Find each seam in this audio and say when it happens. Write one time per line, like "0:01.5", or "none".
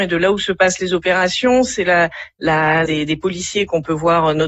0:02.9